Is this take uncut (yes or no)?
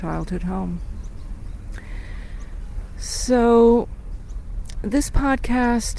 yes